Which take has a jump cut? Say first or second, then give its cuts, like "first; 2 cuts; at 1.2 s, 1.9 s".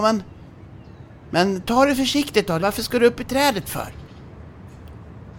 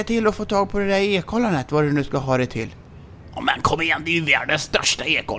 first; 1 cut; at 2.6 s